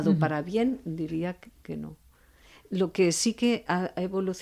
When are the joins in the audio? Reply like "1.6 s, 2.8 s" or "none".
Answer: none